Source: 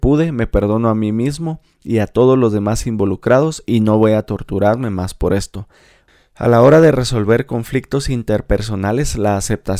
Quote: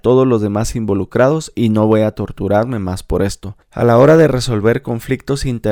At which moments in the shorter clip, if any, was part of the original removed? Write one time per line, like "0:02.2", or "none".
0:03.6